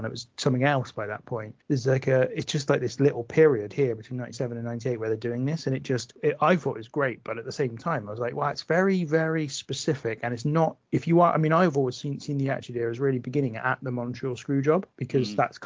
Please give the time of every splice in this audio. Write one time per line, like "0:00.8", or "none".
none